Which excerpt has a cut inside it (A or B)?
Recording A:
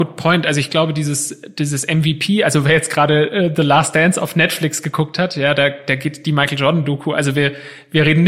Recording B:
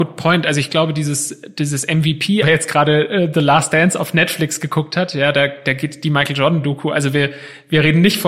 B